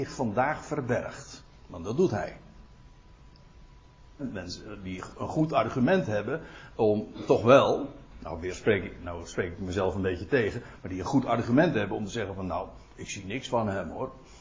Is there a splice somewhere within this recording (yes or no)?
yes